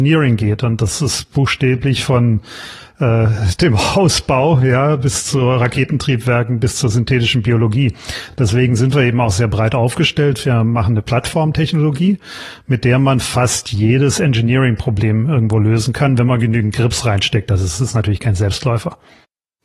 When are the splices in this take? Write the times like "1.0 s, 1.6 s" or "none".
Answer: none